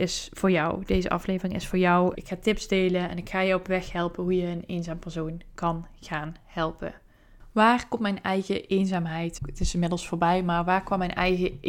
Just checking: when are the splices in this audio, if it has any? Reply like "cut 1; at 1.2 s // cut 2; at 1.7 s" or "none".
cut 1; at 2.1 s // cut 2; at 9.4 s